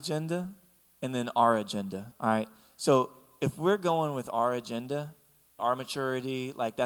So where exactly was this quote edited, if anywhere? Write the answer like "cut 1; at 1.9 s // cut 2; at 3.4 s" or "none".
cut 1; at 2.1 s // cut 2; at 5.6 s